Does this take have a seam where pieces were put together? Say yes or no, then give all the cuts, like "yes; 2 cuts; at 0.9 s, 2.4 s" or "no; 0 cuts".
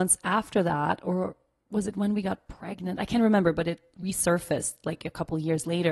no; 0 cuts